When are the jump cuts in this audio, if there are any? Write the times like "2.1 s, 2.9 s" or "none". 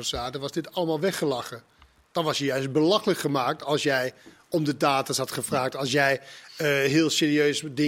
none